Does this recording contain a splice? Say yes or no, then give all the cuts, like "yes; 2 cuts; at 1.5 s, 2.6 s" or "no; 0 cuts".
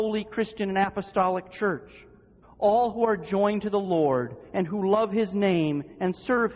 yes; 1 cut; at 2.4 s